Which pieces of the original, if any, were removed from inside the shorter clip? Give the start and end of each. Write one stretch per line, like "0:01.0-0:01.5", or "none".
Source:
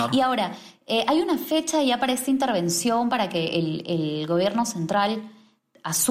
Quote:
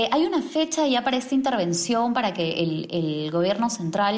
none